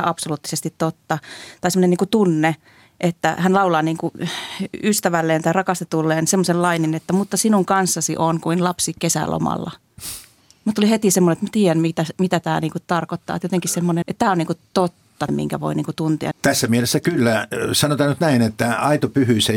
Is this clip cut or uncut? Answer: cut